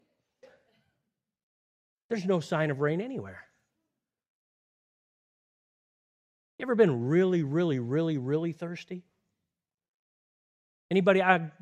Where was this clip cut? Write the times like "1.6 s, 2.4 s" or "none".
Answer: none